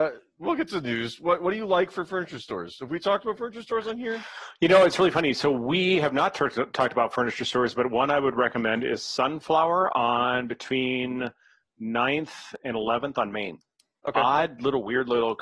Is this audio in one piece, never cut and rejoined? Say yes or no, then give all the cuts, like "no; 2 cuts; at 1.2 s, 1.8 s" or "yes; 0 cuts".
yes; 0 cuts